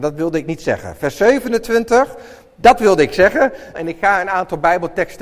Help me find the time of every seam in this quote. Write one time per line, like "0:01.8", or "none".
0:03.7